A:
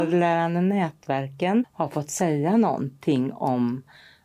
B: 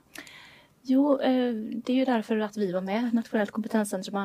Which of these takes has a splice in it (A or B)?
A